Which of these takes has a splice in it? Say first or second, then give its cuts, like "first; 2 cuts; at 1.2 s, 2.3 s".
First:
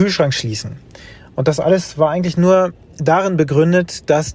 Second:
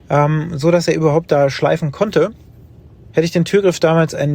second; 1 cut; at 3.1 s